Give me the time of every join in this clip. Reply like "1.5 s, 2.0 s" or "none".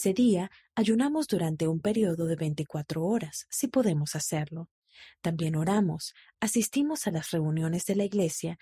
none